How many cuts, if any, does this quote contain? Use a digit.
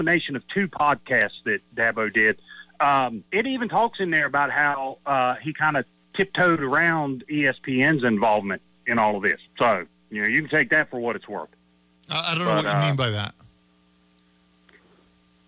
2